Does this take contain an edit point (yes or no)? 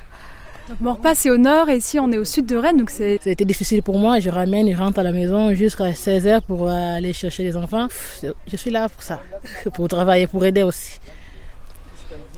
yes